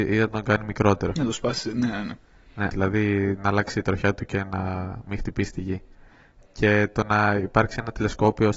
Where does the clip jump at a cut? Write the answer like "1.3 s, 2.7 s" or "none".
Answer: 2.7 s, 6.4 s